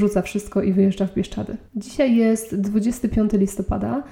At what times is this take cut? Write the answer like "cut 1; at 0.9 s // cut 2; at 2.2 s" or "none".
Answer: cut 1; at 1.7 s

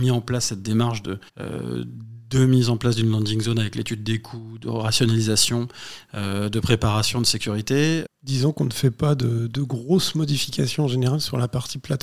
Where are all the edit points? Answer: cut 1; at 1.3 s // cut 2; at 8.1 s

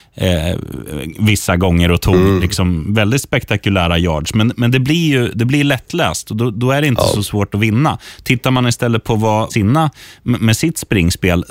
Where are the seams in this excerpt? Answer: cut 1; at 9.5 s

